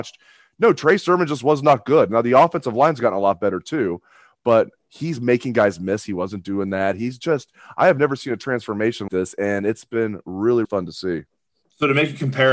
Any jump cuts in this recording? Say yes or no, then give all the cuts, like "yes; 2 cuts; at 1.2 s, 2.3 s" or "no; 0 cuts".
yes; 2 cuts; at 9.1 s, 10.6 s